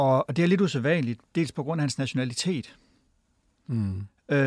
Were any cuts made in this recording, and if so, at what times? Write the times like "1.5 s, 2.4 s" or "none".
none